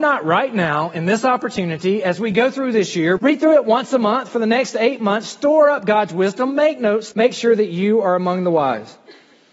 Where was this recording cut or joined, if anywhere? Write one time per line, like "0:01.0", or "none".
0:03.2
0:07.1